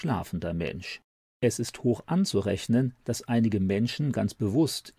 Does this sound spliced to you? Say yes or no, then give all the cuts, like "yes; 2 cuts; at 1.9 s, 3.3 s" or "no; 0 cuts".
yes; 1 cut; at 1.2 s